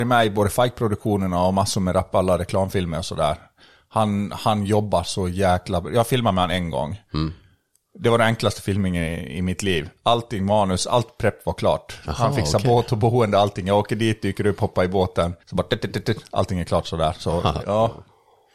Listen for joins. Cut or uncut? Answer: cut